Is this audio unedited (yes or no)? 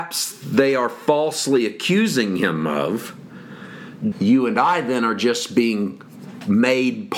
no